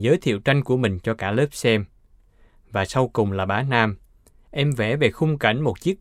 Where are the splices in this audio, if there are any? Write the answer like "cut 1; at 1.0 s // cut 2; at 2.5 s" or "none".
none